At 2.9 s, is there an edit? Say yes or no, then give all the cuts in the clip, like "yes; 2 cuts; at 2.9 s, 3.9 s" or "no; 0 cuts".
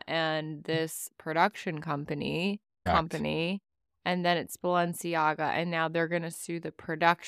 yes; 1 cut; at 2.9 s